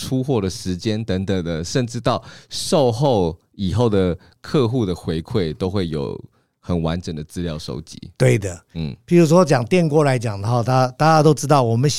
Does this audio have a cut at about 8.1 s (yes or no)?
no